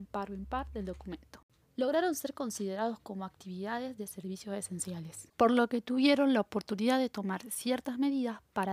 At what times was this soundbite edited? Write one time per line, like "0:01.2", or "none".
0:01.6
0:05.3